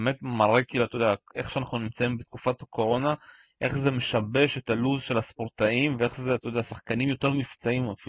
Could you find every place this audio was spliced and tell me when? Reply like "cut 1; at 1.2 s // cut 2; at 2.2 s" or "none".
none